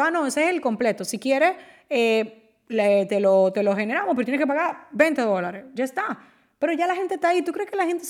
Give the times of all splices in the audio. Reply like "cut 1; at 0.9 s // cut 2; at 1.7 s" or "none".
none